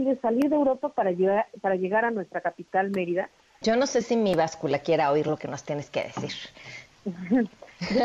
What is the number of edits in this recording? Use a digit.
1